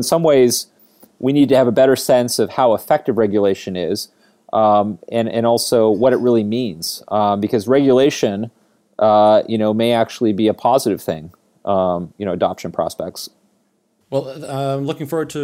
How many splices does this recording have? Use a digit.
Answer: 1